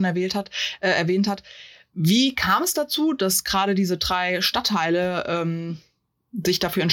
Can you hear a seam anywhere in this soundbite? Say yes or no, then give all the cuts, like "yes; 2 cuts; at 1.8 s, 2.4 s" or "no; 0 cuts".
no; 0 cuts